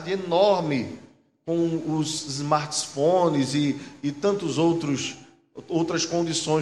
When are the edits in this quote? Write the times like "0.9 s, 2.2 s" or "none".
none